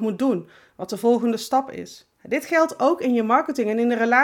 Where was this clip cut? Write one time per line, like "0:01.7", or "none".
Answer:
0:02.1